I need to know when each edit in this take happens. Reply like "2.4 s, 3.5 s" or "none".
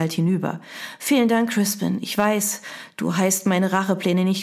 none

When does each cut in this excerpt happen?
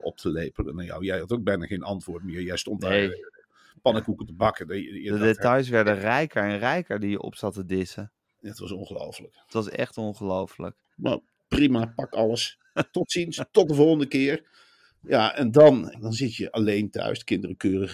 10.9 s, 15.9 s

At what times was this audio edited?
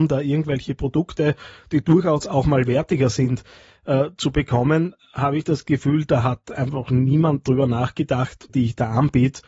8.5 s

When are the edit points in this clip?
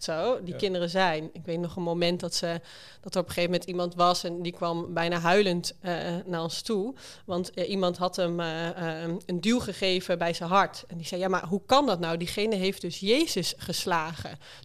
none

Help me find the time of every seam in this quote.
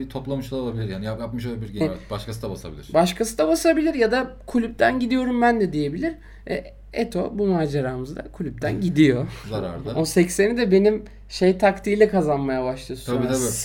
1.8 s, 9.4 s

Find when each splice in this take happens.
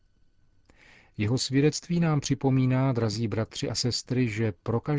none

